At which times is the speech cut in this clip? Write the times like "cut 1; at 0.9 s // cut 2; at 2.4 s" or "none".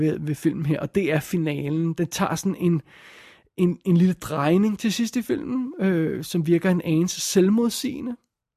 none